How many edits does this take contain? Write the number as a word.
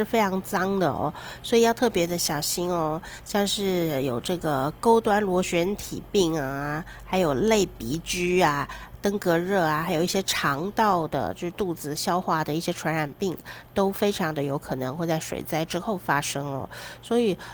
zero